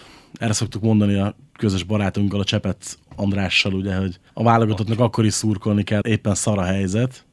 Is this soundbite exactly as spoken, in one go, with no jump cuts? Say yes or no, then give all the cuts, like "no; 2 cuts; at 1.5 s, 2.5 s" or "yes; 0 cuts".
no; 2 cuts; at 4.3 s, 6.0 s